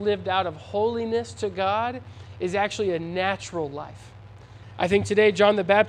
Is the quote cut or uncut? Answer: cut